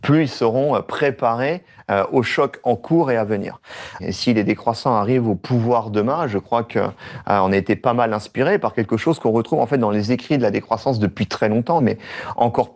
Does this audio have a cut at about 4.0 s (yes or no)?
yes